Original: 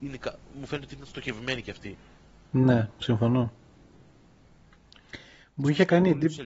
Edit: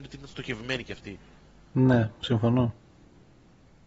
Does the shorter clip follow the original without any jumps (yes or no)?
yes